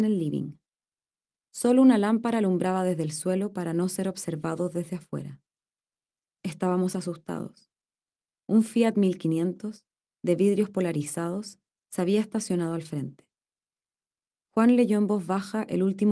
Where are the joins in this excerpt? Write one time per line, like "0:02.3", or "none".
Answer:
0:14.3